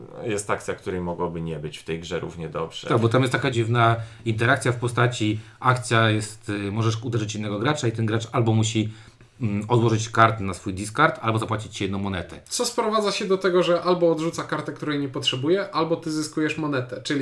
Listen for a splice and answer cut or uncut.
cut